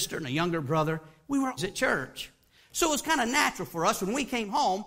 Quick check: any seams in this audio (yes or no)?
yes